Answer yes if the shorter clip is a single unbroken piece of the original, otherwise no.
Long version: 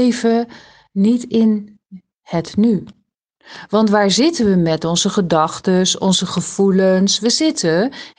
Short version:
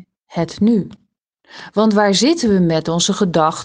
yes